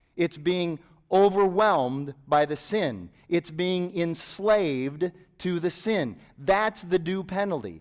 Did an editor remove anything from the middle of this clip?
no; 0 cuts

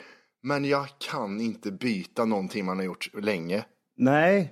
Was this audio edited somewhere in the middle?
no; 0 cuts

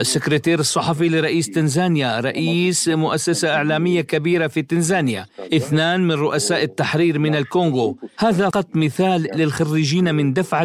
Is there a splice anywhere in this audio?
yes; 1 cut; at 8.5 s

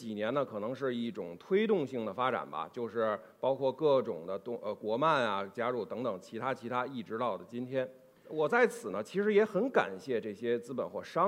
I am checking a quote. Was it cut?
no; 0 cuts

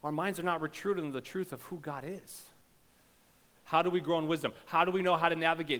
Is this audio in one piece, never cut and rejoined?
no; 1 cut; at 3.5 s

